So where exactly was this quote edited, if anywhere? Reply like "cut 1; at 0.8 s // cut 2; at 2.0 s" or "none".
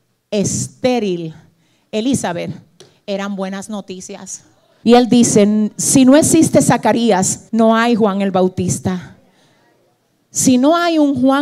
cut 1; at 4.8 s // cut 2; at 7.5 s